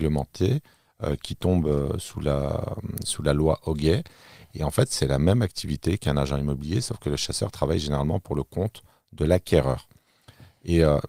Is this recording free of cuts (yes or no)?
yes